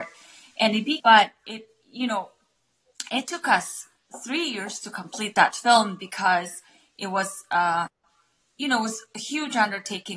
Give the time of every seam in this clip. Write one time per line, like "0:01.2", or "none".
0:01.0